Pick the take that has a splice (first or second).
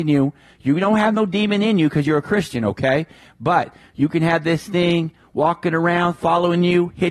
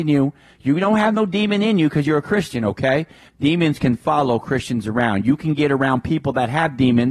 second